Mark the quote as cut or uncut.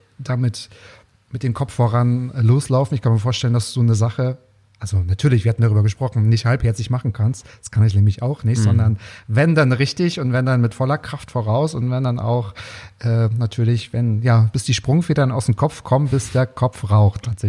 cut